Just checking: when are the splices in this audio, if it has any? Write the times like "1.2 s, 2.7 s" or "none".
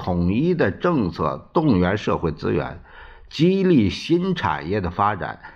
none